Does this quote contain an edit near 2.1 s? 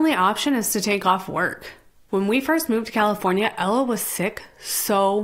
yes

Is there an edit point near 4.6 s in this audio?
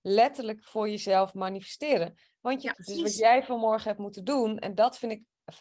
no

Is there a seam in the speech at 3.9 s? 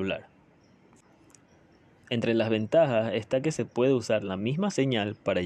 no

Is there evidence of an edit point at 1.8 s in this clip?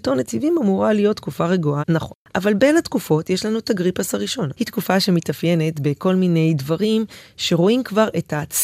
yes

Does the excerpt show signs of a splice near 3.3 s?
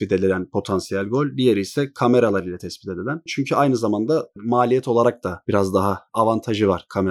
yes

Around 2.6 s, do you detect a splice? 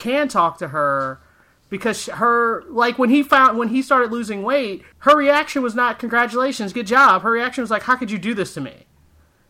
no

